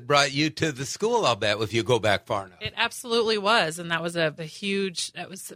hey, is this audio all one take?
no; 1 cut; at 4.4 s

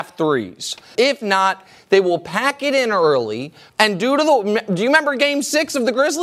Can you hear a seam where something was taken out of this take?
yes; 2 cuts; at 0.9 s, 3.7 s

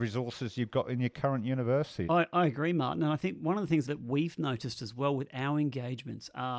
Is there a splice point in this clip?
yes; 2 cuts; at 2.1 s, 3.8 s

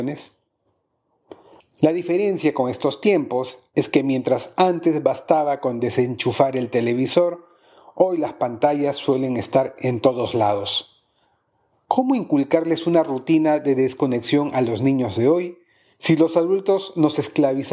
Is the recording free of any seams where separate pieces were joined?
no; 1 cut; at 1.6 s

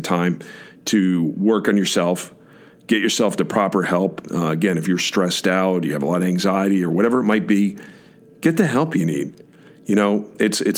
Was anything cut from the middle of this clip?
no; 0 cuts

